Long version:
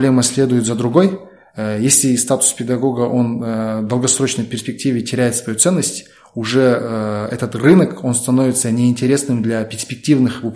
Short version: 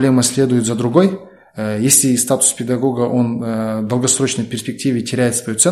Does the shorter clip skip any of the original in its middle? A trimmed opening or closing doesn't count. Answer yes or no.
no